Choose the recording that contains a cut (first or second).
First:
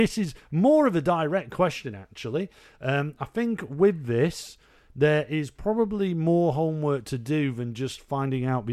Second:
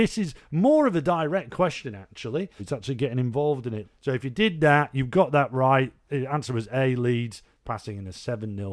second